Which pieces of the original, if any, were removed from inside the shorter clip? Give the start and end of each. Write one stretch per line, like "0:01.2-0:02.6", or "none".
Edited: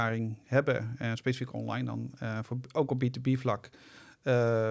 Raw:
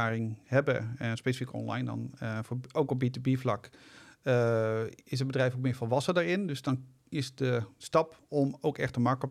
none